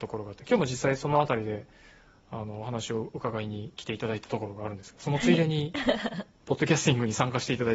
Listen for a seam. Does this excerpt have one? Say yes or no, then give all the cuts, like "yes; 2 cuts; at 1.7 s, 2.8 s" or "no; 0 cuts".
no; 0 cuts